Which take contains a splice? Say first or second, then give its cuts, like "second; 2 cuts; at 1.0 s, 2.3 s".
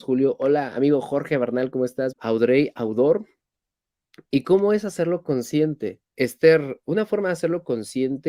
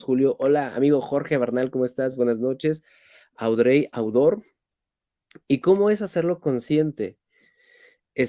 first; 2 cuts; at 2.1 s, 6.1 s